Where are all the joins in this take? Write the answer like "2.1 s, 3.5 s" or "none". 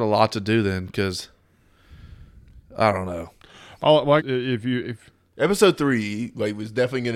4.2 s